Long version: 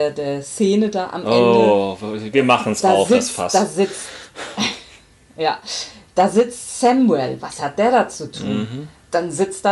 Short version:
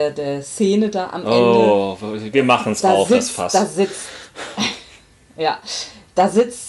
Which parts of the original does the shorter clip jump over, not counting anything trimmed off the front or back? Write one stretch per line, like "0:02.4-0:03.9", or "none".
none